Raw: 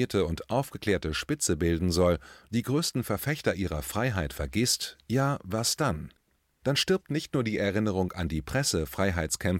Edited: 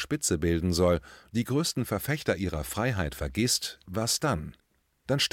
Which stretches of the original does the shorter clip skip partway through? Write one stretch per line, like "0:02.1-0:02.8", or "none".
0:05.0-0:05.4

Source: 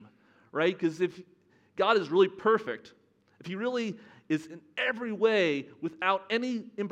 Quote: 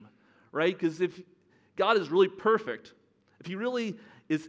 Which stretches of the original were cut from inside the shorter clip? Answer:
none

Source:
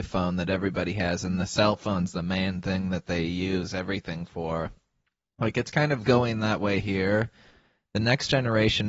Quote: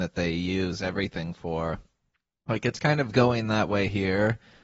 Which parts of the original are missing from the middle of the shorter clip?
none

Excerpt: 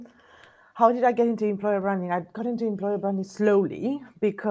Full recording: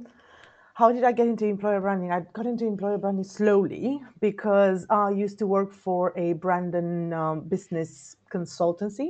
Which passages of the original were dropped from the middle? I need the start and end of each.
none

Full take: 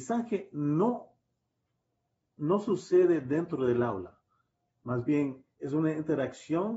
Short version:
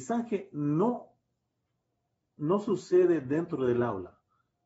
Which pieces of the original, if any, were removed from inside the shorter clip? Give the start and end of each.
none

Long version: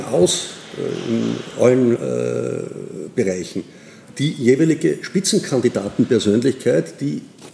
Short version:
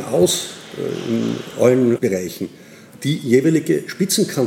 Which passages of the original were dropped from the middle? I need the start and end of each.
0:02.0-0:03.1

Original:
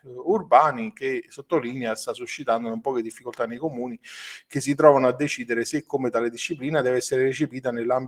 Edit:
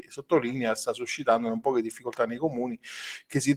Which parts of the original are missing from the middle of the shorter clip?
none

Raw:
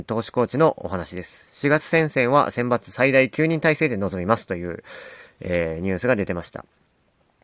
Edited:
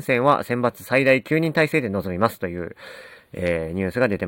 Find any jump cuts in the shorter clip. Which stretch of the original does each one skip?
none

